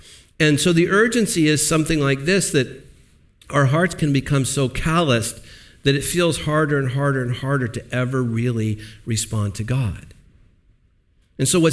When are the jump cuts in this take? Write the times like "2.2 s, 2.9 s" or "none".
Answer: none